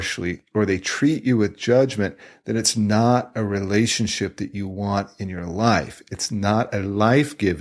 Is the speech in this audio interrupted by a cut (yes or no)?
no